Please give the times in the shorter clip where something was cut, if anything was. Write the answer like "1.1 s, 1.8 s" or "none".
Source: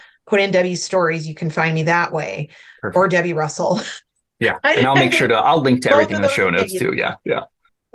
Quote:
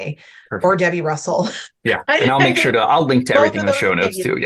1.7 s